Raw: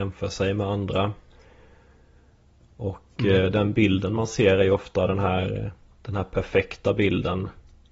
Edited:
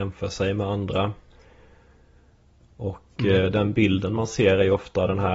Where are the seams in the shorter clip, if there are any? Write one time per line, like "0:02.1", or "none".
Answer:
none